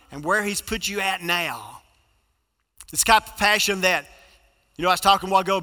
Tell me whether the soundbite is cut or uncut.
cut